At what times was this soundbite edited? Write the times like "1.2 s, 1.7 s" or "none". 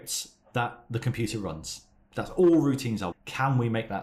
3.1 s